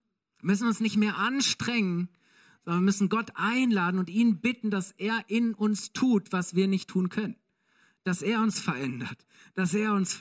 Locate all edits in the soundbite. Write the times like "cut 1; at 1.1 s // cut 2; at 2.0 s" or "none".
none